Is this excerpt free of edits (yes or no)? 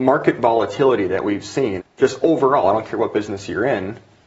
no